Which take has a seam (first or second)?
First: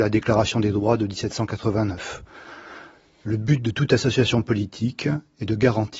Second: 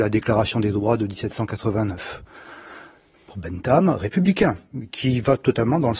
second